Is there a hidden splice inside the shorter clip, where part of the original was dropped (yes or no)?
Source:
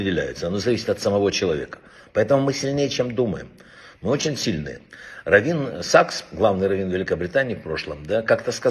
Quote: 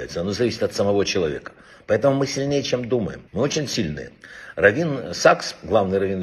yes